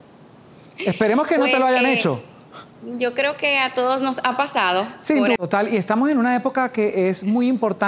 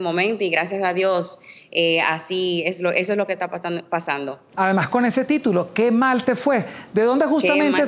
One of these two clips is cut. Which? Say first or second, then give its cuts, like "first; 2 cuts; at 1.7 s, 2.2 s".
first; 2 cuts; at 2.7 s, 5.4 s